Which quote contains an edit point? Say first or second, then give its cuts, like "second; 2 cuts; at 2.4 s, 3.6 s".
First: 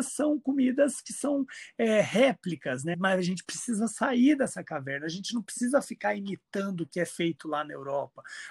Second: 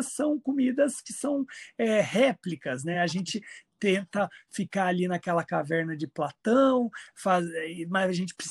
first; 1 cut; at 2.9 s